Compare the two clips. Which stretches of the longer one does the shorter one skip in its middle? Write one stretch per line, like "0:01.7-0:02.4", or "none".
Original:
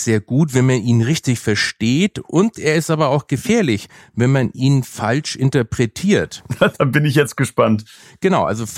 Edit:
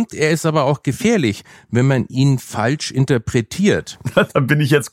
none